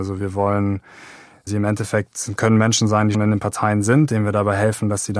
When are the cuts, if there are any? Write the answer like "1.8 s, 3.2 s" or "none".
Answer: 3.1 s